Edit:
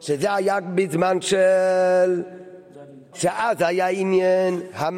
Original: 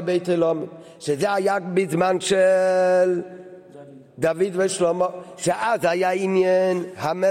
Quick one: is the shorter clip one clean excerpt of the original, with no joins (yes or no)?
no